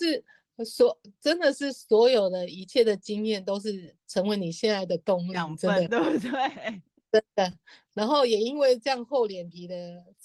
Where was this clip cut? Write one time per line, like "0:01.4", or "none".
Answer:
none

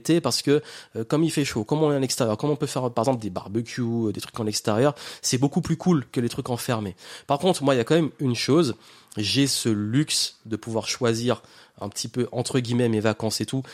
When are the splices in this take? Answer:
none

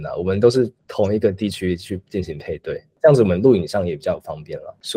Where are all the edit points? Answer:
none

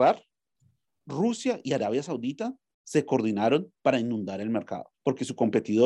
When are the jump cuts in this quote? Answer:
0:04.9

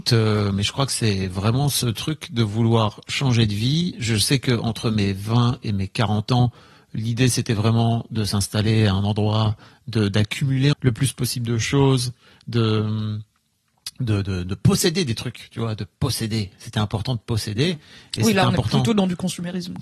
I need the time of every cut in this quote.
0:10.7

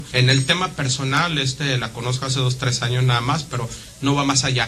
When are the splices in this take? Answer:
none

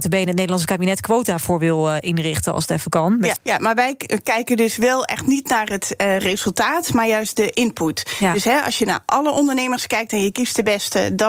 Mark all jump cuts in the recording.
0:03.4

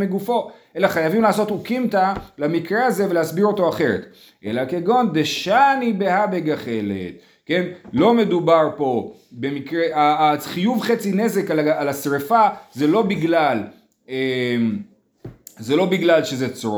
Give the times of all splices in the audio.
none

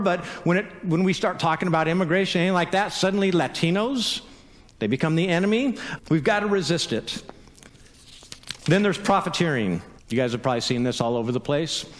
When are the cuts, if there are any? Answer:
0:06.0
0:10.0

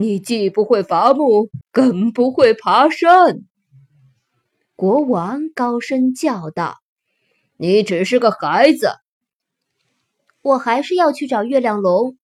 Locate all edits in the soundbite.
0:01.6

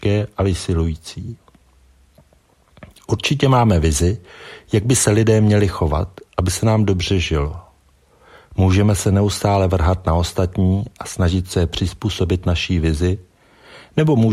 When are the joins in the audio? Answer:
none

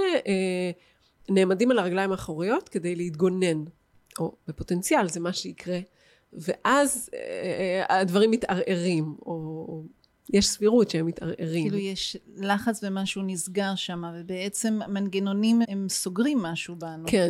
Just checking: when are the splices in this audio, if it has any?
0:15.6

